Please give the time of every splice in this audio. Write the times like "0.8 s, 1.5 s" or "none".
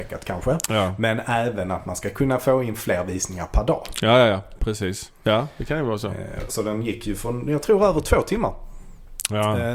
6.5 s